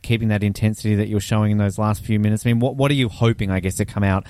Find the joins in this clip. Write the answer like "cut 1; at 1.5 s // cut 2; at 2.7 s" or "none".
none

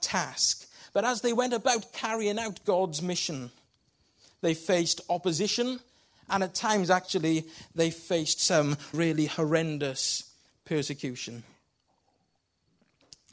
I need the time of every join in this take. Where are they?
cut 1; at 8.9 s

